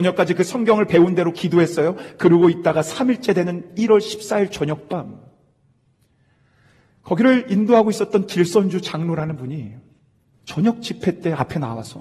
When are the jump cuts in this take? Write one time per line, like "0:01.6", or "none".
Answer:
none